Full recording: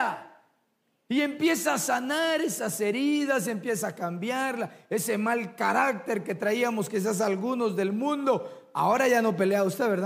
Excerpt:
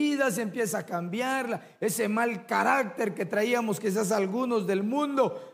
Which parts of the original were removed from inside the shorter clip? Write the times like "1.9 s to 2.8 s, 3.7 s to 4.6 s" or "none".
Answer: none